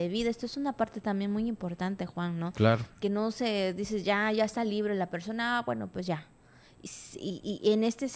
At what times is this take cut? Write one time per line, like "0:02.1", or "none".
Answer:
none